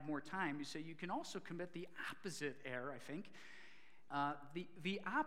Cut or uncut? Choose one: cut